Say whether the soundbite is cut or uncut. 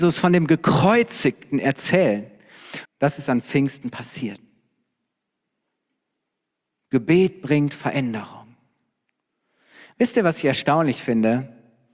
cut